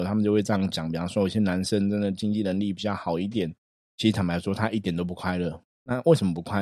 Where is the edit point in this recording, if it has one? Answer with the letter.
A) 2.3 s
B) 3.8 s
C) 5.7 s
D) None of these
B